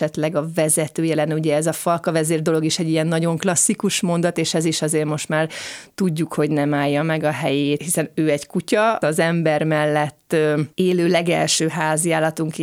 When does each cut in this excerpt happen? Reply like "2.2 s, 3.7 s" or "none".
7.8 s, 9.0 s